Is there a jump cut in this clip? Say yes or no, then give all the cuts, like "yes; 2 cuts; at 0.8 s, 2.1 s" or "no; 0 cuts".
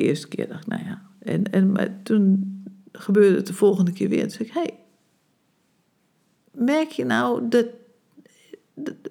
no; 0 cuts